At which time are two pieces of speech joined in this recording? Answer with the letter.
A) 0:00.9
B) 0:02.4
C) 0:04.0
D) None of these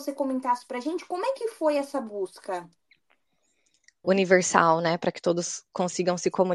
C